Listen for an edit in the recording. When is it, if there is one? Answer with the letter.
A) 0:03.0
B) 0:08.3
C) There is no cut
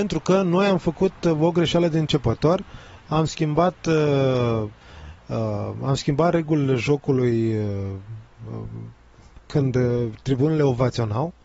C